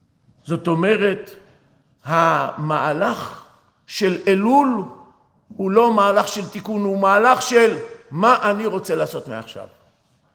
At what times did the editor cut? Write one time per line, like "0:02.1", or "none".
none

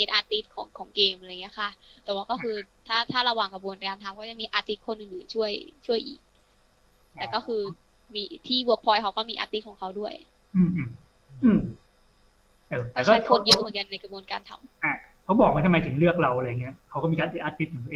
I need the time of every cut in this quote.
none

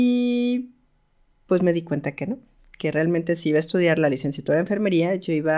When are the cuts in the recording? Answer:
none

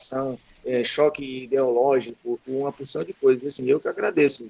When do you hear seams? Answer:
0:02.4

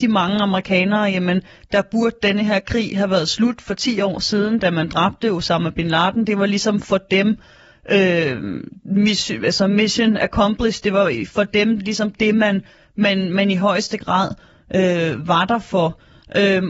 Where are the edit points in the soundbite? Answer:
none

